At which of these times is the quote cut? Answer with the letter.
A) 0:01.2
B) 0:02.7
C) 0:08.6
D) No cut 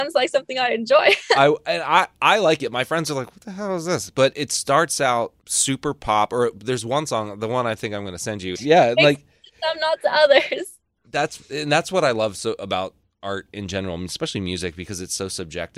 C